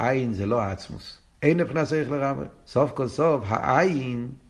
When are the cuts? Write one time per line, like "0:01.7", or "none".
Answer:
0:01.4
0:02.7